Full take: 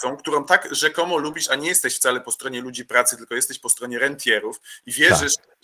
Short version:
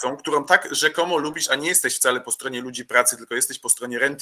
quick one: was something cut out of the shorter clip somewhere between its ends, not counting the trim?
no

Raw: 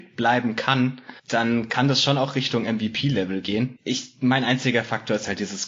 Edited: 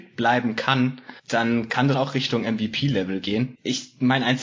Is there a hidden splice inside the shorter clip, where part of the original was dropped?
yes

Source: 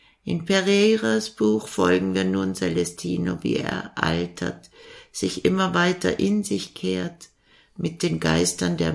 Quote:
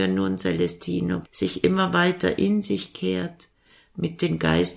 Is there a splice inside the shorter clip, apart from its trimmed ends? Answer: yes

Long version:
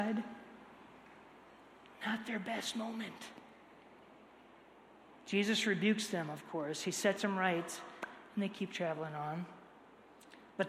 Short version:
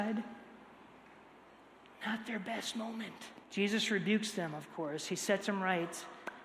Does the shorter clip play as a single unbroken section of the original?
no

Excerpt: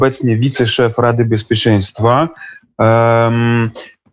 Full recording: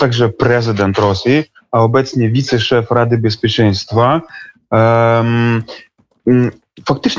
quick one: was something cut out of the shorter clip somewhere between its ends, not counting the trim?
no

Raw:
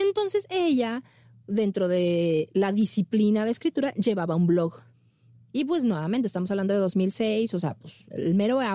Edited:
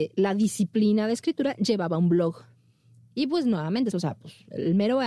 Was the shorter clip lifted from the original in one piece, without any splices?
no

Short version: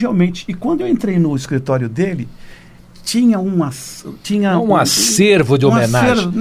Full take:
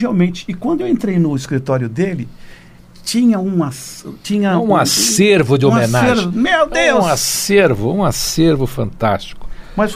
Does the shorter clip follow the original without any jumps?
yes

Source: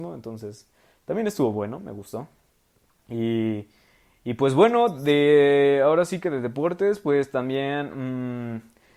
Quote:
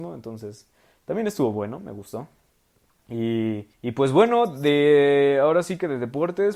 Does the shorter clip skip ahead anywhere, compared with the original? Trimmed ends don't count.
yes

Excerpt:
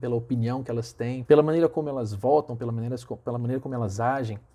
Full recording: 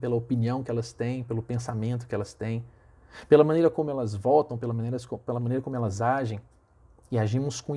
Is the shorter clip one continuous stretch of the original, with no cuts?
no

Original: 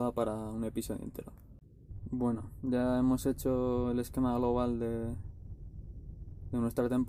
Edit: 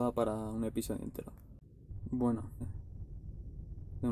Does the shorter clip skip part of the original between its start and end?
yes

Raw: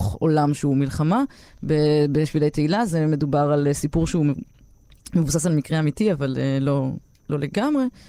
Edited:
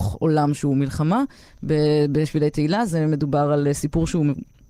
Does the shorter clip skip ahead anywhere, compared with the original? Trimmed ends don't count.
no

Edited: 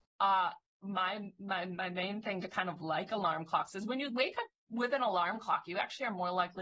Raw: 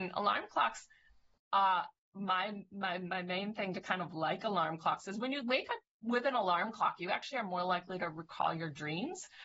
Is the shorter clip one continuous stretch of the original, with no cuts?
yes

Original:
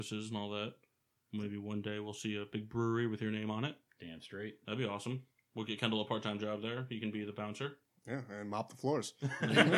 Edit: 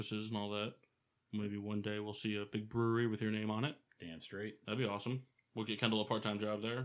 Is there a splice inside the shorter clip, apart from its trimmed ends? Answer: no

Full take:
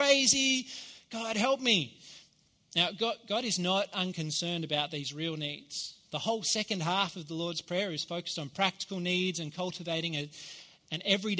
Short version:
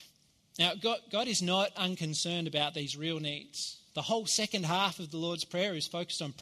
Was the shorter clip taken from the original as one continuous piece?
yes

